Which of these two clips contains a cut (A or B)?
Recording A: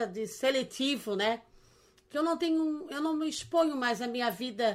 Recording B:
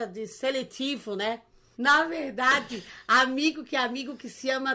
B